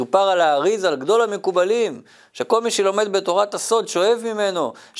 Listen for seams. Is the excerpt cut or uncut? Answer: uncut